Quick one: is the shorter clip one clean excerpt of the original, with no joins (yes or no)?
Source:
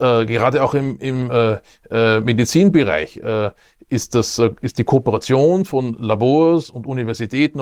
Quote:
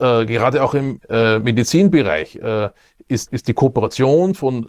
no